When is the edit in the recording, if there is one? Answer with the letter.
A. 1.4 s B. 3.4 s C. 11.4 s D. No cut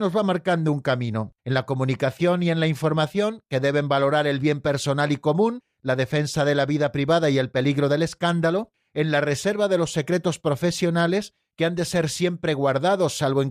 A